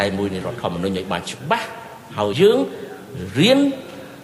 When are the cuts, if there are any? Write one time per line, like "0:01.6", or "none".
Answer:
0:02.3

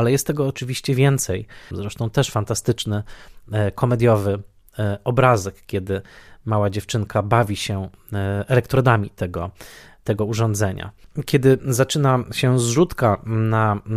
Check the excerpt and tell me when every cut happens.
0:01.7

